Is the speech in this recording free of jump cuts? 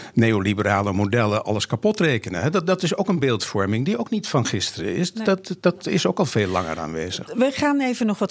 yes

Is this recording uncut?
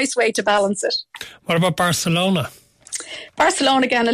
yes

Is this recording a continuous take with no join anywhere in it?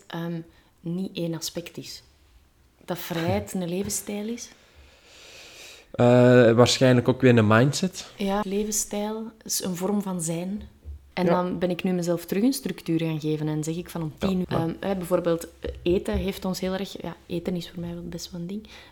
no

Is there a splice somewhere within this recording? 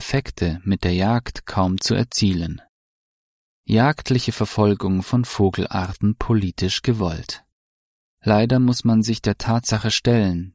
no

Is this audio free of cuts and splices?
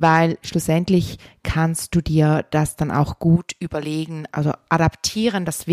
no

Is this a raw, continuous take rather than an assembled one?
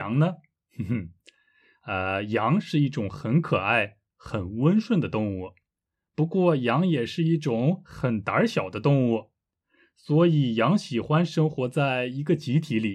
yes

